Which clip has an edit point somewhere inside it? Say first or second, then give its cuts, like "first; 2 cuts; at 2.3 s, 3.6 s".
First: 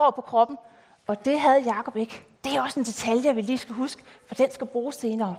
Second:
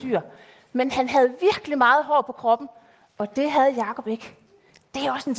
first; 1 cut; at 2.3 s